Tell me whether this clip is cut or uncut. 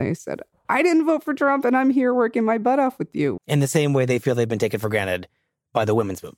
cut